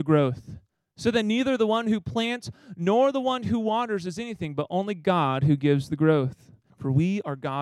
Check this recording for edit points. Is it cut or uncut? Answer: cut